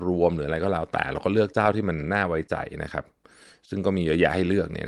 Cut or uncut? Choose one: uncut